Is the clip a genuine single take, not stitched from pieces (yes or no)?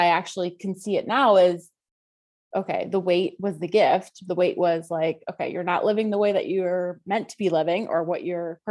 yes